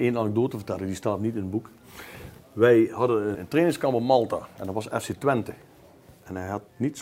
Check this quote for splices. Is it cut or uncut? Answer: cut